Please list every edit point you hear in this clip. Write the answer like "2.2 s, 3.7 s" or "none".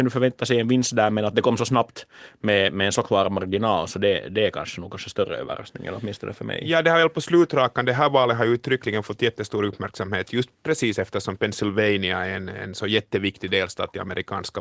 none